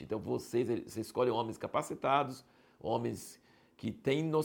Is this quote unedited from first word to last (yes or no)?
yes